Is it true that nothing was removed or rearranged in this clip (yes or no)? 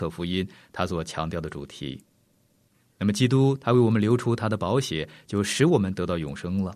yes